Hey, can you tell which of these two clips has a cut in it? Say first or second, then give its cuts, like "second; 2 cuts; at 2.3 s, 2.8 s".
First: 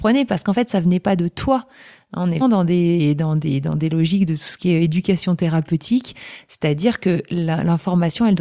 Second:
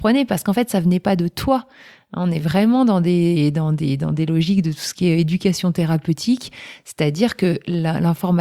first; 1 cut; at 2.4 s